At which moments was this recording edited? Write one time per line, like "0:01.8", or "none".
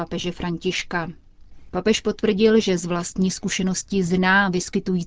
0:01.7